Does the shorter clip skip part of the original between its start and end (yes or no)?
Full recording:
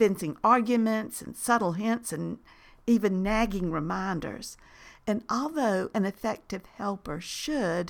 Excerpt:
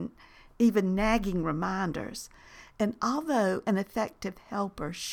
no